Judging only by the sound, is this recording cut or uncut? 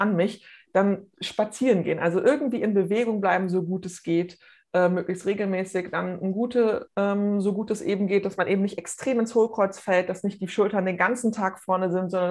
cut